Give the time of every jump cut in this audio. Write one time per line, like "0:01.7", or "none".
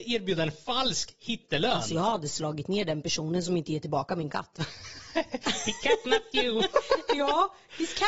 none